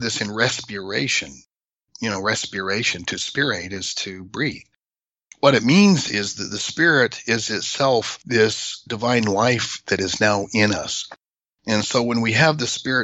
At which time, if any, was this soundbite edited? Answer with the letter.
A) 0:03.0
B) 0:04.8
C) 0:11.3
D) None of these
A